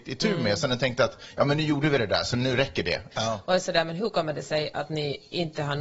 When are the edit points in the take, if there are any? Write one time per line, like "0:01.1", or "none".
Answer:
0:03.1